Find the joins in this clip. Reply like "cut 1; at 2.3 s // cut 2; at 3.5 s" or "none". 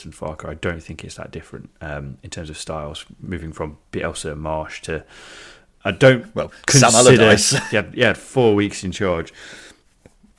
cut 1; at 7.7 s